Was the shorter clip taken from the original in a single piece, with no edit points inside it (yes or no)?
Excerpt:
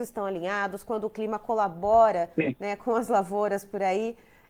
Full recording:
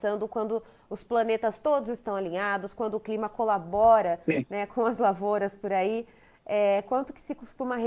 yes